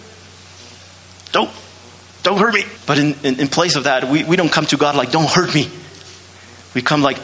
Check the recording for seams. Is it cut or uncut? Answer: cut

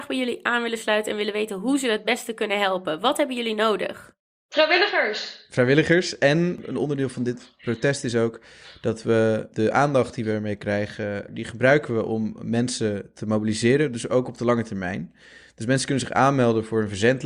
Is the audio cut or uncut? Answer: uncut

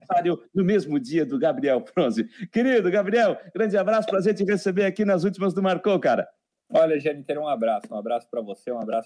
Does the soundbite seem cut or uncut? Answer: uncut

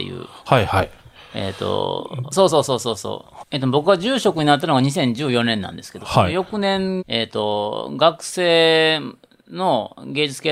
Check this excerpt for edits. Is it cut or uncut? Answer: cut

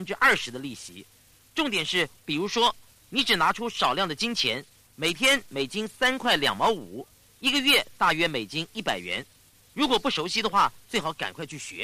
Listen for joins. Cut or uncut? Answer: cut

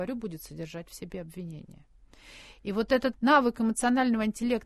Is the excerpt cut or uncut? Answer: cut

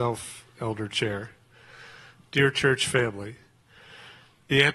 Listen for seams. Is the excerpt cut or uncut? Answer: uncut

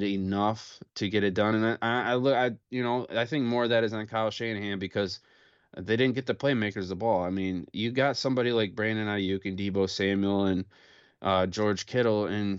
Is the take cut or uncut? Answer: uncut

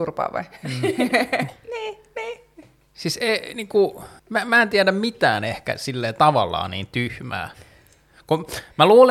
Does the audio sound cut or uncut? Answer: cut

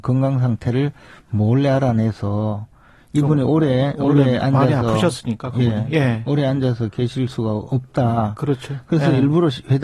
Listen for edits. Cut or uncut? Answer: uncut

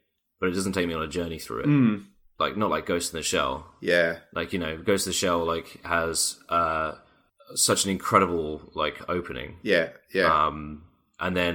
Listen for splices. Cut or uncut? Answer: uncut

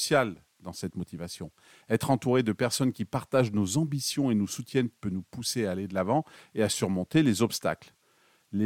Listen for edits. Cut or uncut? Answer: uncut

